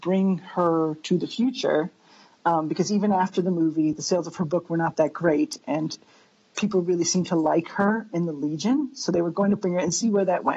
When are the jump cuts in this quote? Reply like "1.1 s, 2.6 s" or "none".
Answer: none